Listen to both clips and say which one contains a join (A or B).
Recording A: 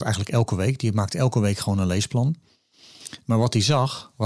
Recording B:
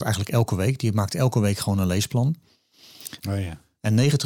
B